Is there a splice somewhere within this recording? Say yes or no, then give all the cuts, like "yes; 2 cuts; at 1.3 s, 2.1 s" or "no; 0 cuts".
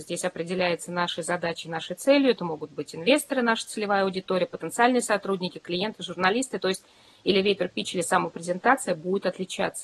no; 0 cuts